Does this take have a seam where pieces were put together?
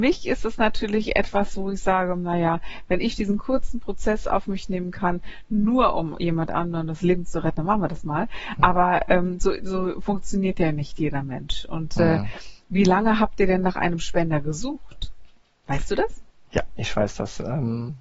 no; 0 cuts

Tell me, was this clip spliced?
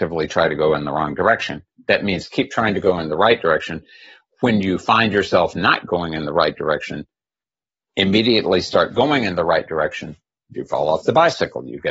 yes; 1 cut; at 10.5 s

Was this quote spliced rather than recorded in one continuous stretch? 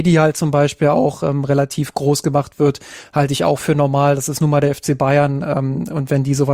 no; 0 cuts

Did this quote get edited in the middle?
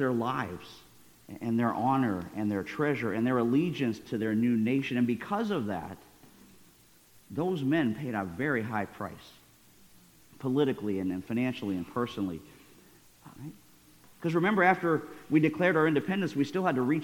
yes; 1 cut; at 13.4 s

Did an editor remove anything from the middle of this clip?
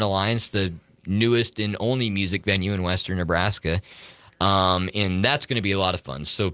no; 0 cuts

